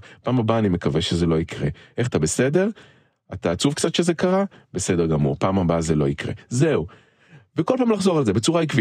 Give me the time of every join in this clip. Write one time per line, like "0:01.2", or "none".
0:02.1